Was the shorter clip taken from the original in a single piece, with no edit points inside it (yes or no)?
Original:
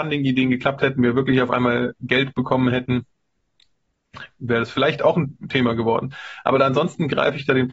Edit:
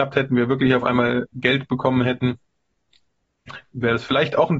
yes